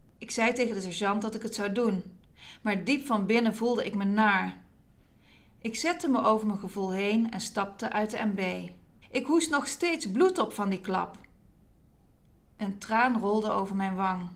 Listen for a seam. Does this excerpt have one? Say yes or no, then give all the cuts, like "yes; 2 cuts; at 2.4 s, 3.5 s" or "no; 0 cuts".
yes; 1 cut; at 9.0 s